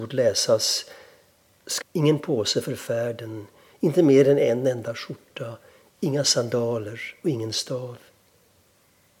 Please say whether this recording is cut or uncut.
cut